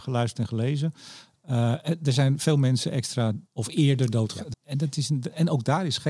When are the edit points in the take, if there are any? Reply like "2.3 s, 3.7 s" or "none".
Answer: 3.5 s, 4.5 s